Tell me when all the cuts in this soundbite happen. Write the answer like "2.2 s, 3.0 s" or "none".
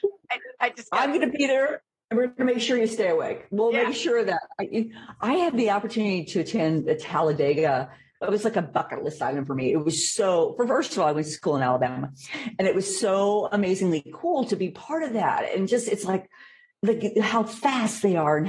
none